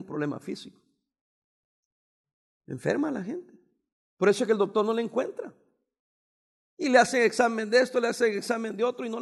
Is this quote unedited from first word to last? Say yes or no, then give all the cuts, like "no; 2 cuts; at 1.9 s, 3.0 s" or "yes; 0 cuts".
yes; 0 cuts